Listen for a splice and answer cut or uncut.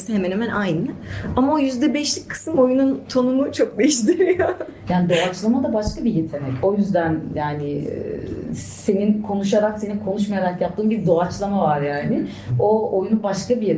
uncut